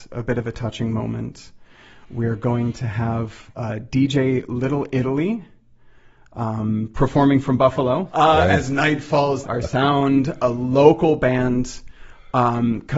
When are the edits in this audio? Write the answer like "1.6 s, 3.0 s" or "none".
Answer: 8.1 s, 9.4 s